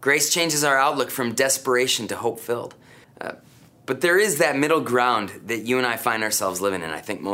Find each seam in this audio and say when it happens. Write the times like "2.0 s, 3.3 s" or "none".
3.0 s